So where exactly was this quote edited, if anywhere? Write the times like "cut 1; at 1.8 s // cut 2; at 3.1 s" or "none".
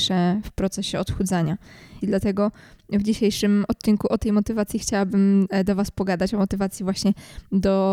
cut 1; at 2.0 s